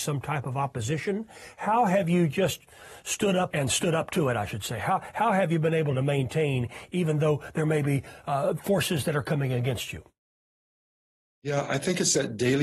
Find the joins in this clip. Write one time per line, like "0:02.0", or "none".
0:03.5